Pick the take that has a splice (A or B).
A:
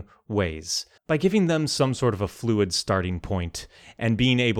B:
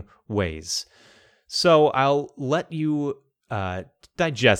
A